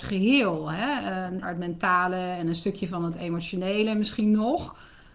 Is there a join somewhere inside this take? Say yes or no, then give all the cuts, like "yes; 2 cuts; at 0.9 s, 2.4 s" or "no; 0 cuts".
yes; 1 cut; at 1.4 s